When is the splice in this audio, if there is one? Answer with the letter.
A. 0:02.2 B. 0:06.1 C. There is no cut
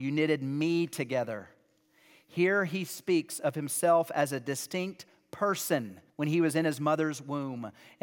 B